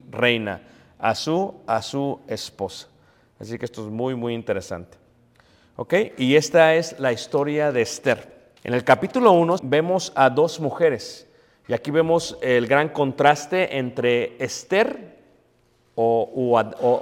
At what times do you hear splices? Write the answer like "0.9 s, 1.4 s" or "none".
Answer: 8.6 s, 9.6 s